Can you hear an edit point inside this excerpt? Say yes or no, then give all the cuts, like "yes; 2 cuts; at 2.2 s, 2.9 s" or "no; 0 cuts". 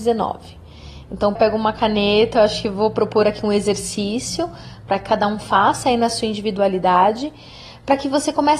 yes; 1 cut; at 1.4 s